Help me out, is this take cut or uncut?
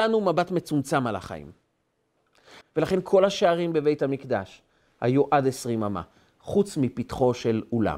cut